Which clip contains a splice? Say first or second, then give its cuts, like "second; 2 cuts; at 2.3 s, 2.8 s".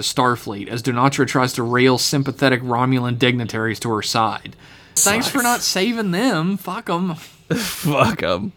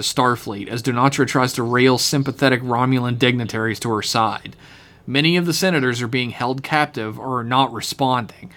first; 1 cut; at 5.0 s